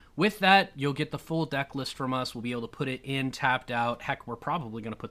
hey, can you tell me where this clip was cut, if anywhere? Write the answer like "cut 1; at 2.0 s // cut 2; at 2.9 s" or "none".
none